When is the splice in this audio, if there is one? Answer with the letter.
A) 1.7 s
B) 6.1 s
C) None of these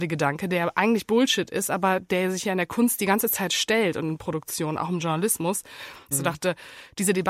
B